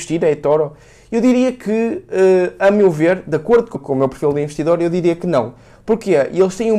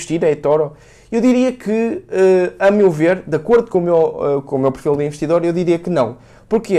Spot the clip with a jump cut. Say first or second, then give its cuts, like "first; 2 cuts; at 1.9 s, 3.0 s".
first; 1 cut; at 3.7 s